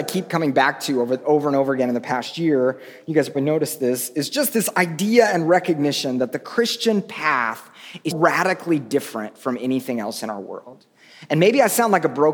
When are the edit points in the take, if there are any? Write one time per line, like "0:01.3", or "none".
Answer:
0:03.3
0:08.1